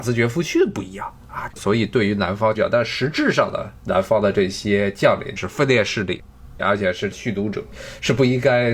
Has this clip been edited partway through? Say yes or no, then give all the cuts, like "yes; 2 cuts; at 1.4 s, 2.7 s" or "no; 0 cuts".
yes; 3 cuts; at 1.5 s, 2.5 s, 5.4 s